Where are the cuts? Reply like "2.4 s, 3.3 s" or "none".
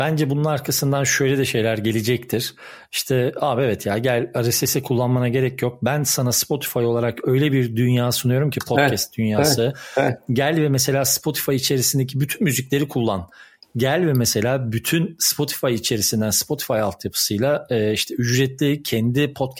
none